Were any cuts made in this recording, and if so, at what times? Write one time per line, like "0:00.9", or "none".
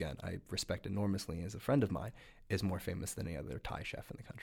none